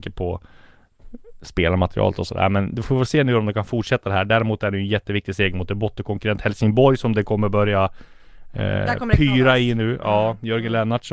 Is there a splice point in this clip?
no; 0 cuts

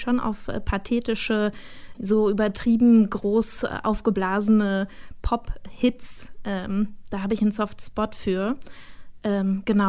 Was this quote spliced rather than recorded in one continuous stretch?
yes; 1 cut; at 1.9 s

